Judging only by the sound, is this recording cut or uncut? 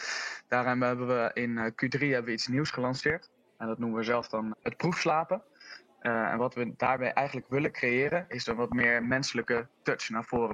cut